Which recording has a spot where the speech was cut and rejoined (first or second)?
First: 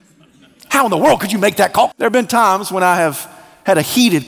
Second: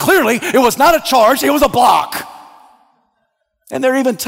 first